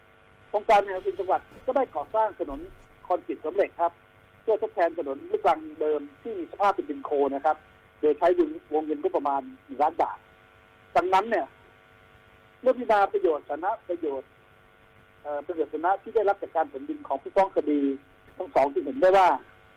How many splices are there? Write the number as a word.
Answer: one